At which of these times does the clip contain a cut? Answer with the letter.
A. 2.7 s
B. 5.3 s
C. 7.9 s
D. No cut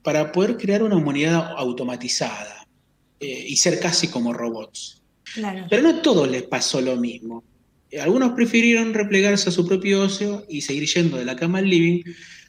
B